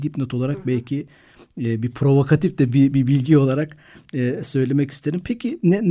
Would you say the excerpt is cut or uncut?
uncut